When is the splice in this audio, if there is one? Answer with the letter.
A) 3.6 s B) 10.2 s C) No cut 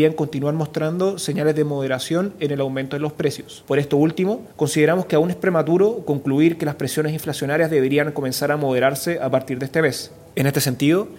A